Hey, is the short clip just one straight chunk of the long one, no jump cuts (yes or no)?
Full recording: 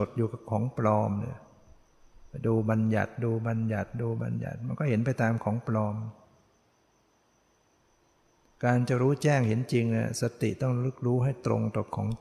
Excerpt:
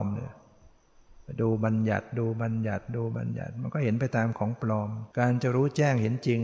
no